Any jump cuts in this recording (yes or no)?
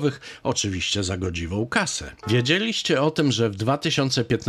yes